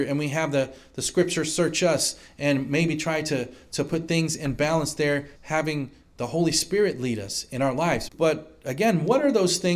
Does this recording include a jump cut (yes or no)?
yes